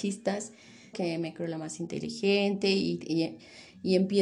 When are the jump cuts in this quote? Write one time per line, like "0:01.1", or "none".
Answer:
0:00.9